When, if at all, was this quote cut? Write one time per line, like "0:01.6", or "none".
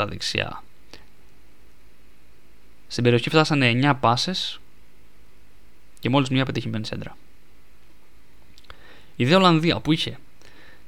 none